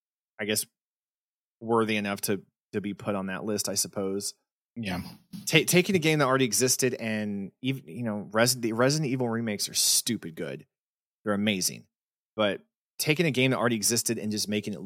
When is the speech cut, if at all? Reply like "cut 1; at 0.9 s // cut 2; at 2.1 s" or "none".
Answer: cut 1; at 4.6 s